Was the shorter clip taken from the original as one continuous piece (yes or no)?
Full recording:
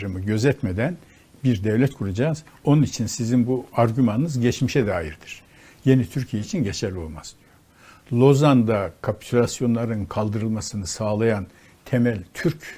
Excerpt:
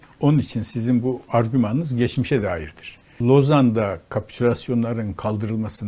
no